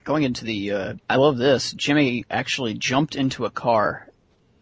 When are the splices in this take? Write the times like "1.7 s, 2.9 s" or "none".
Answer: 1.0 s